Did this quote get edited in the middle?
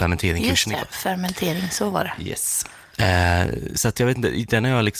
no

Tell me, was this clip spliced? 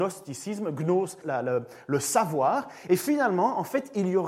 yes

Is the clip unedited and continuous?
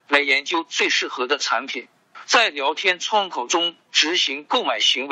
no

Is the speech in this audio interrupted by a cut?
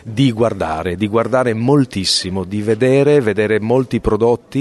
no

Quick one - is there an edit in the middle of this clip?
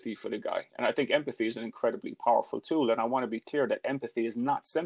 no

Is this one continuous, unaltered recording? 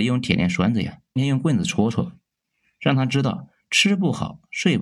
no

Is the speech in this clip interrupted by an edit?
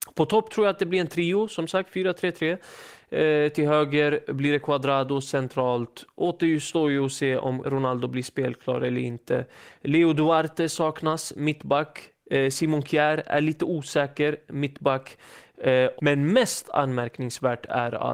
yes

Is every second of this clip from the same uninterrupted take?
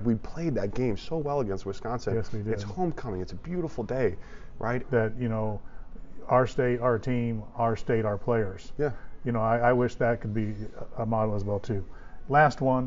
no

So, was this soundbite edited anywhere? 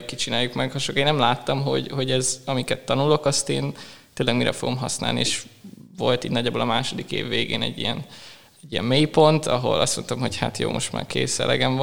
no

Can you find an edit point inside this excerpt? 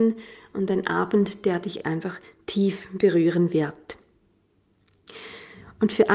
no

